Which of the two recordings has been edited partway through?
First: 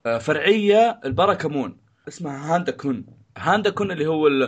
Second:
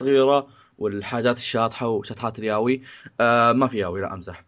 first; 1 cut; at 2.0 s

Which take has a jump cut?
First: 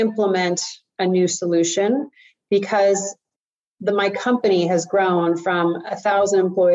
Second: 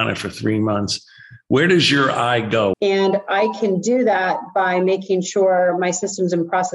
second; 1 cut; at 2.7 s

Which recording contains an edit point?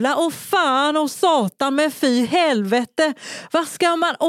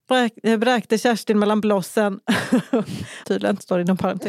second; 1 cut; at 3.2 s

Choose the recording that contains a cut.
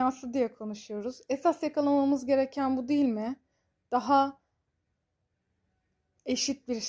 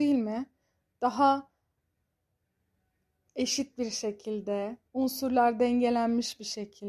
second; 1 cut; at 4.9 s

